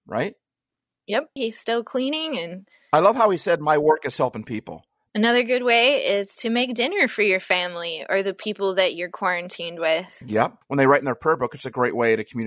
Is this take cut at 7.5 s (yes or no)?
no